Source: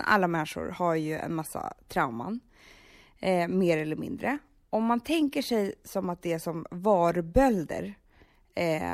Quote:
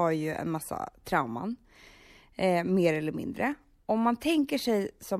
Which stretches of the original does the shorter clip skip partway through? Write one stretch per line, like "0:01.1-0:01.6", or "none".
none